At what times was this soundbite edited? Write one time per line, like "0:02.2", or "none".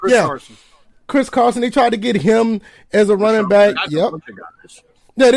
0:03.8